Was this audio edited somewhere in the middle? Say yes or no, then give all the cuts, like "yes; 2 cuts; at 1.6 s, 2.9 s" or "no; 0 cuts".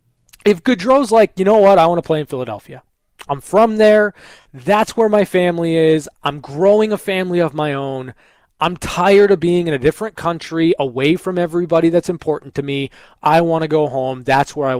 no; 0 cuts